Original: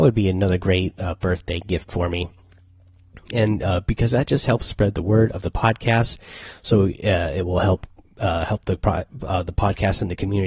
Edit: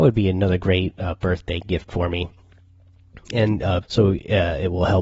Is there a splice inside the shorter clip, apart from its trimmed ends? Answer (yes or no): yes